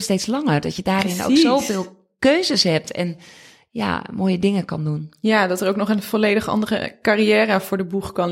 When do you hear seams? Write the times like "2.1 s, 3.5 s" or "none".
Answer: none